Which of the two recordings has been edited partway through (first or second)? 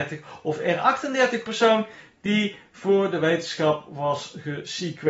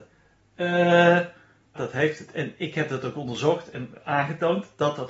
second